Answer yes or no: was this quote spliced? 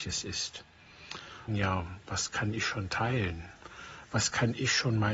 yes